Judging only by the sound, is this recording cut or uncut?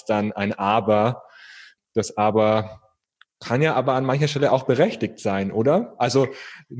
uncut